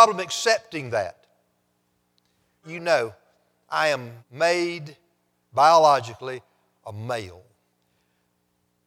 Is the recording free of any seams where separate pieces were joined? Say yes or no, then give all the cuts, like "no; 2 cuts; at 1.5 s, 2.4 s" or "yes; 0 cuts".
no; 2 cuts; at 2.6 s, 4.2 s